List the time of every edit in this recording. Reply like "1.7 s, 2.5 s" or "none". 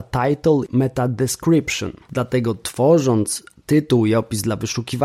2.0 s